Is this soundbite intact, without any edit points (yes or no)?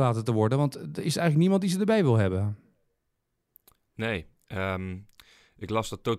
yes